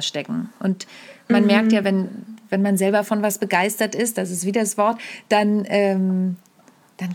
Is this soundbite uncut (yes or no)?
yes